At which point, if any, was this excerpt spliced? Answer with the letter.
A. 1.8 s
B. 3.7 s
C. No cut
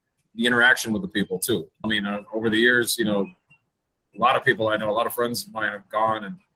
A